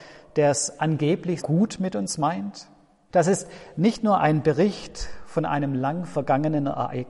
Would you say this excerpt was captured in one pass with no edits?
no; 2 cuts; at 1.4 s, 3.1 s

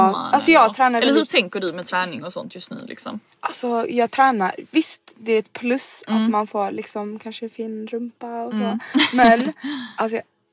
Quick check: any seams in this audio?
no; 0 cuts

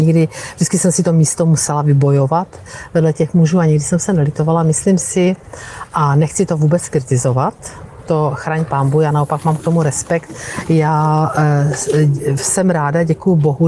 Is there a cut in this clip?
no; 0 cuts

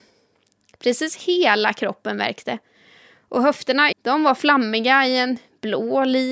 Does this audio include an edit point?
yes; 1 cut; at 3.9 s

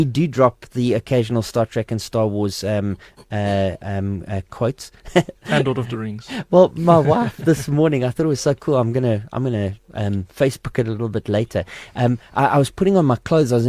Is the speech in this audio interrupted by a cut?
no; 0 cuts

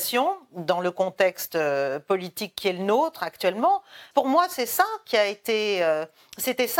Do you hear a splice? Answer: yes; 1 cut; at 4.1 s

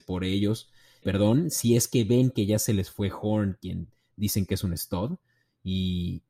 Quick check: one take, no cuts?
no; 1 cut; at 1.0 s

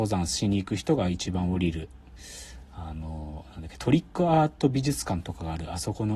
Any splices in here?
no; 0 cuts

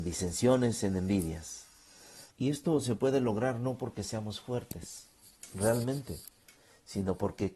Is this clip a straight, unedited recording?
no; 1 cut; at 2.3 s

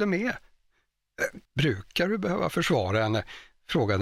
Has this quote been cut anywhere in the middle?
yes; 1 cut; at 1.5 s

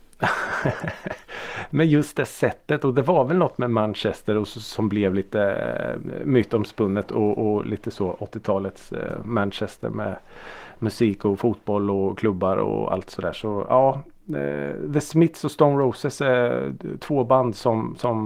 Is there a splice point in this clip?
no; 0 cuts

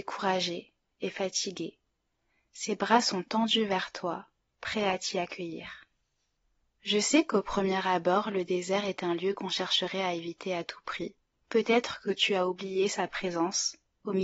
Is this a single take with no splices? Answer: no; 1 cut; at 11.4 s

